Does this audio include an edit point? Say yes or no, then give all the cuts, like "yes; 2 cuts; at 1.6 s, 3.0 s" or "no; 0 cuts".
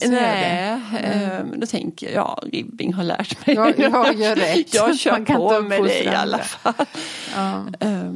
no; 0 cuts